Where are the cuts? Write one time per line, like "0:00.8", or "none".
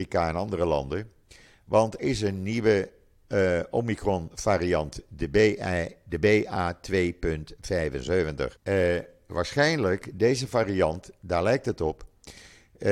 0:02.0
0:08.6